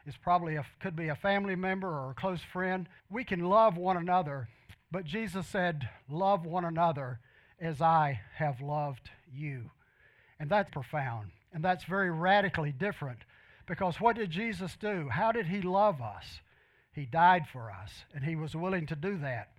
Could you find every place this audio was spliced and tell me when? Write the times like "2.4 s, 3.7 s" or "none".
3.0 s, 10.7 s